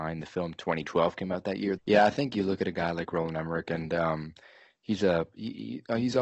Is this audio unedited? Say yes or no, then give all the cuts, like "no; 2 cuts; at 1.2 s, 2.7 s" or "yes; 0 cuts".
no; 1 cut; at 1.8 s